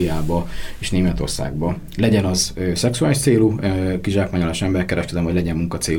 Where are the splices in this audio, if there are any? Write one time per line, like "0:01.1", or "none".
none